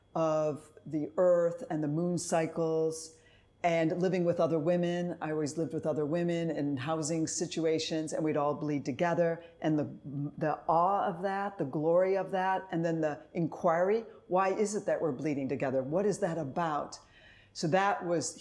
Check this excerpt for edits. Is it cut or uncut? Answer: uncut